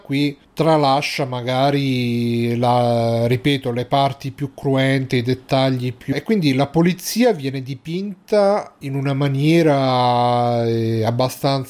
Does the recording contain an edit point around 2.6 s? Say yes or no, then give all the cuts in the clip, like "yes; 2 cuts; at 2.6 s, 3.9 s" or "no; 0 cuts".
no; 1 cut; at 6.1 s